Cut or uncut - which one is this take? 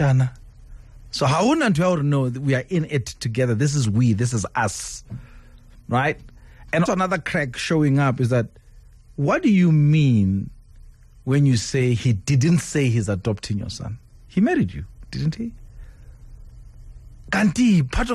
cut